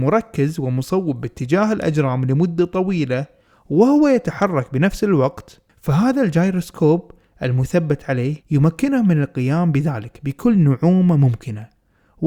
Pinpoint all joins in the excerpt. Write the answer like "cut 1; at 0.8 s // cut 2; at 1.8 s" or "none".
cut 1; at 5.7 s // cut 2; at 8.4 s